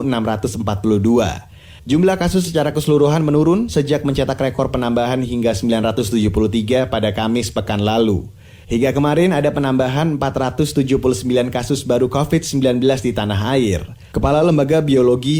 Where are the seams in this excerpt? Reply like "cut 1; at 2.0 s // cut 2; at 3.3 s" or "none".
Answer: cut 1; at 1.8 s // cut 2; at 8.6 s // cut 3; at 14.1 s

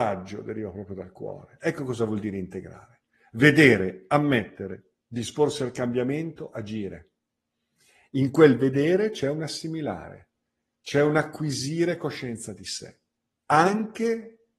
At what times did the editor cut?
none

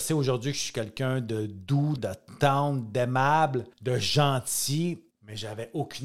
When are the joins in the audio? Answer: cut 1; at 2.0 s // cut 2; at 3.7 s // cut 3; at 5.1 s

